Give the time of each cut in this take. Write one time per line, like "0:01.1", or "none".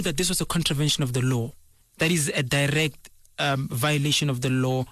0:01.8